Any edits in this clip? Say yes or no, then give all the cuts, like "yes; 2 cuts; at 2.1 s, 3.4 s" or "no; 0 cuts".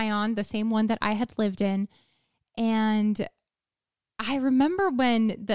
no; 0 cuts